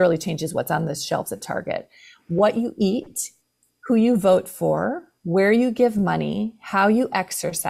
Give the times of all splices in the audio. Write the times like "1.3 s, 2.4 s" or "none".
none